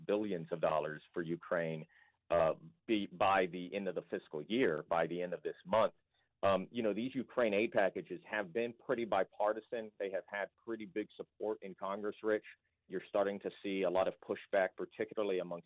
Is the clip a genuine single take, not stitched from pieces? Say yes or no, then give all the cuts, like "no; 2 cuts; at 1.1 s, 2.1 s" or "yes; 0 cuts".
no; 1 cut; at 12.9 s